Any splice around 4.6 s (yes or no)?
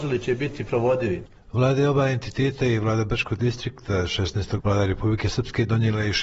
yes